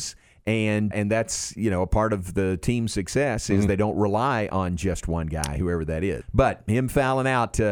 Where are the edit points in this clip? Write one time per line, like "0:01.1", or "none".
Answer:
0:00.9
0:06.2